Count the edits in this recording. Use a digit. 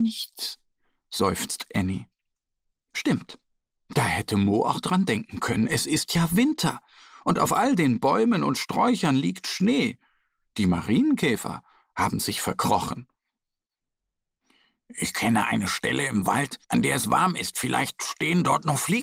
1